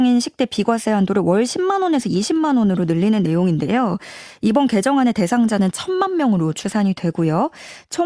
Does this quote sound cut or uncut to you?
uncut